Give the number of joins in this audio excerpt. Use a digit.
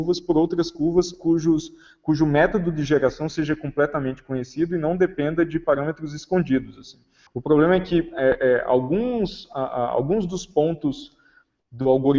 1